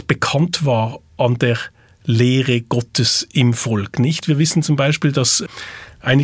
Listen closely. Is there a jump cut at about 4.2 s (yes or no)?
yes